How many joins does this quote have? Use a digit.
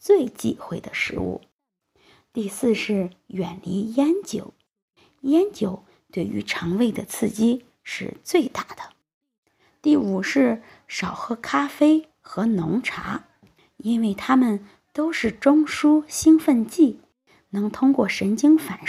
0